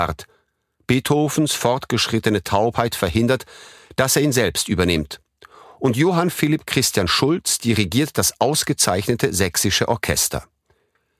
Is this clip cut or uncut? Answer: uncut